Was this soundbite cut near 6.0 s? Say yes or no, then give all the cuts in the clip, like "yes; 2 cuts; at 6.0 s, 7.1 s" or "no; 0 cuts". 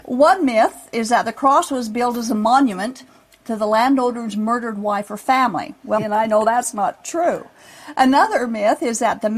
yes; 1 cut; at 6.0 s